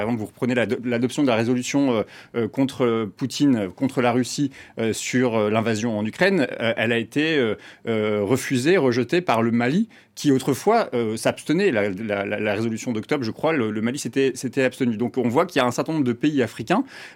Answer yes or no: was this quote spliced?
no